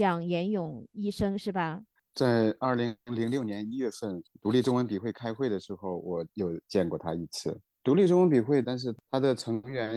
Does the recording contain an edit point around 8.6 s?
yes; 2 cuts; at 2.0 s, 8.6 s

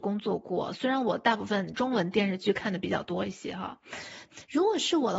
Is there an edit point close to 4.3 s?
yes; 1 cut; at 4.3 s

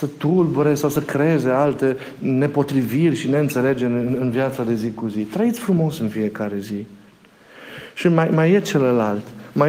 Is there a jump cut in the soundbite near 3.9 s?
no; 0 cuts

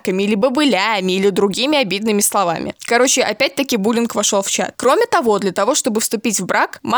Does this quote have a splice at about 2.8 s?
no; 0 cuts

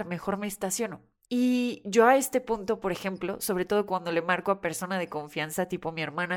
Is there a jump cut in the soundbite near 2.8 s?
no; 1 cut; at 1.3 s

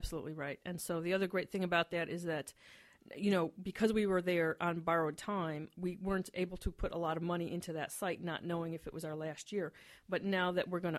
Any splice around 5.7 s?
yes; 1 cut; at 5.7 s

